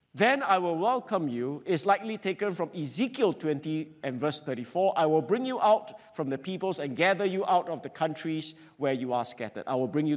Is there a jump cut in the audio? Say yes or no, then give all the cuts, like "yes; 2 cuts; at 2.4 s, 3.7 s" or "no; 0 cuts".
no; 0 cuts